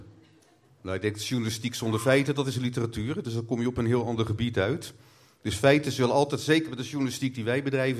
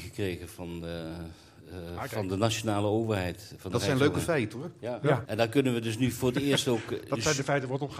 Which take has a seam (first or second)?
second